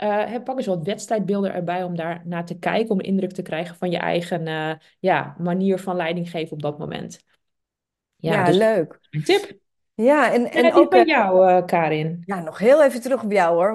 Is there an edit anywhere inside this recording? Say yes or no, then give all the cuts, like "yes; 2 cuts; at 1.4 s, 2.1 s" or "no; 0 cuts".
no; 0 cuts